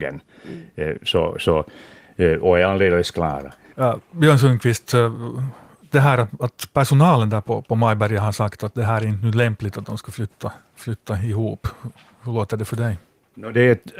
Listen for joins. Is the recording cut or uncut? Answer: cut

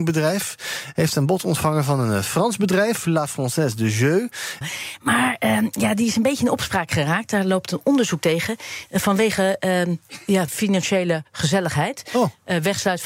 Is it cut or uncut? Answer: cut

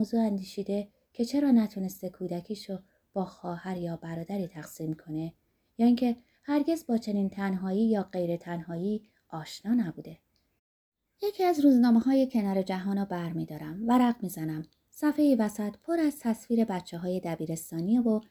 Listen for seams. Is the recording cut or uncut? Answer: uncut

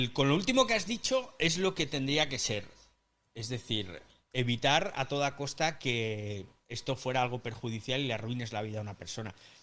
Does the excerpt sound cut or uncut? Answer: uncut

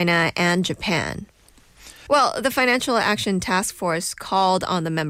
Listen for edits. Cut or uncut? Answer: cut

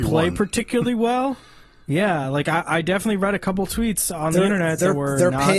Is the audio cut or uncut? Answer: uncut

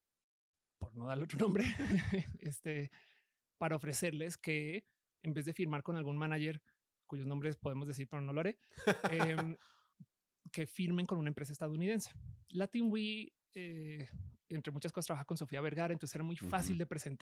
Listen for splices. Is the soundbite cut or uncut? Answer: uncut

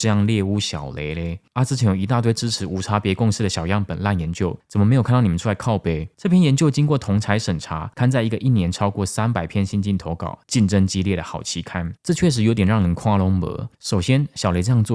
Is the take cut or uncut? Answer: cut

